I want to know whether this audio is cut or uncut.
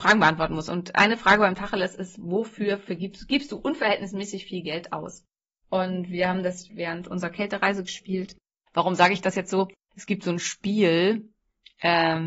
cut